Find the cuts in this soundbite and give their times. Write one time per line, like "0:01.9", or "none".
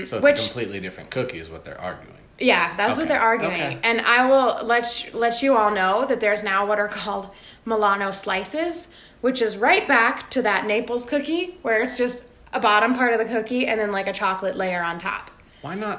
none